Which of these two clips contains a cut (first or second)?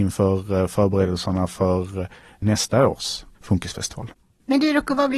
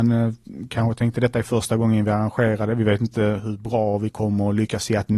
first